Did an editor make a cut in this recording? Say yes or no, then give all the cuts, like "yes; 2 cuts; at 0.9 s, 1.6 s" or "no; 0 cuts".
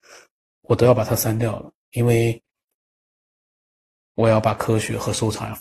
no; 0 cuts